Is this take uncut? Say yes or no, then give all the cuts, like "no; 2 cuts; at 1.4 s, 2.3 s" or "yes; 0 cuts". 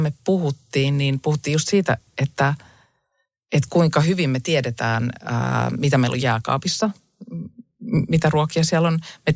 yes; 0 cuts